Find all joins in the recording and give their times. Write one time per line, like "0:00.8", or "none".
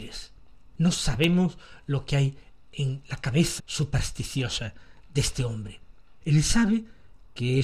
0:03.6
0:06.2